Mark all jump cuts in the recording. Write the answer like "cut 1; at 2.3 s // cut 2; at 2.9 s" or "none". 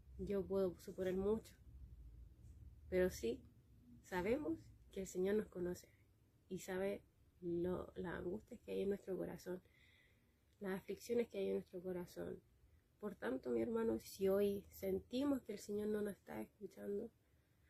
cut 1; at 14.0 s